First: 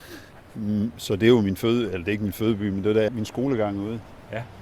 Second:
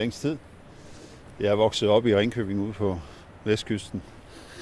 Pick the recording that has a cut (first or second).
first